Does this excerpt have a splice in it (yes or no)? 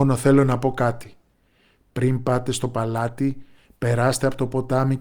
no